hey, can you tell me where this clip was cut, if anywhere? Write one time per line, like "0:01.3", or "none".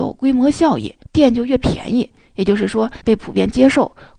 0:01.0
0:03.0